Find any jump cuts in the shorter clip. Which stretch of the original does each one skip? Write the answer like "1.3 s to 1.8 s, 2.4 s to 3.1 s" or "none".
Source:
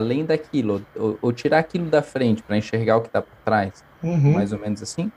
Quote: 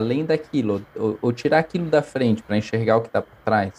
none